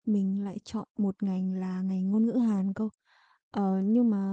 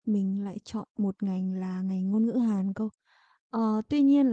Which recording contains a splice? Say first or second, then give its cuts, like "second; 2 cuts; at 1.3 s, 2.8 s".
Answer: second; 1 cut; at 3.4 s